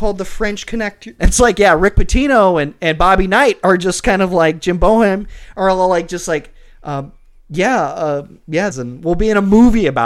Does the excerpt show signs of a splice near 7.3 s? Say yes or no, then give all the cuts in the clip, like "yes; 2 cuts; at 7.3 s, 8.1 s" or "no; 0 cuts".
no; 2 cuts; at 1.2 s, 8.7 s